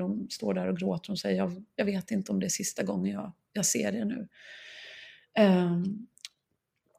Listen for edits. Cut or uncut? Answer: uncut